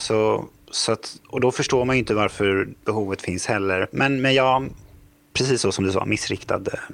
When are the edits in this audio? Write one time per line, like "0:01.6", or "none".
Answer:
none